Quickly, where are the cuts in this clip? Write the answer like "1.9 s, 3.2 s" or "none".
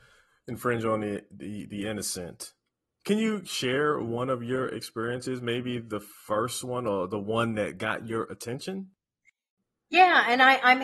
none